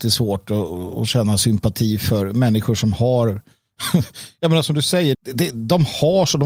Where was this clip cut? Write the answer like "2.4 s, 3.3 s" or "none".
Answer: 5.1 s

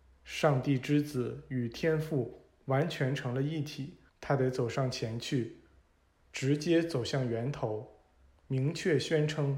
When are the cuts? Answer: 4.1 s

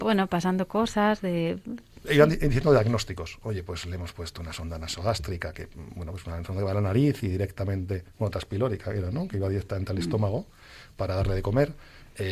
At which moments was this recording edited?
none

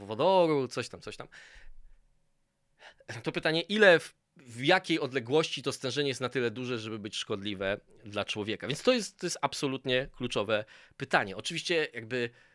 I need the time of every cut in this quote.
none

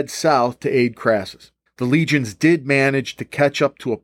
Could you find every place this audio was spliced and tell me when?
1.7 s

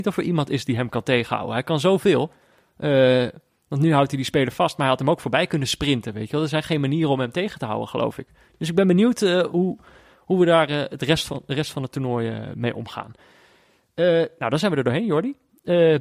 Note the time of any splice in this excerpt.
none

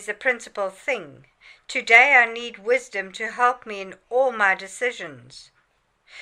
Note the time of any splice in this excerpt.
none

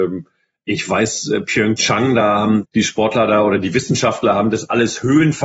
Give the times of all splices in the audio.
2.6 s

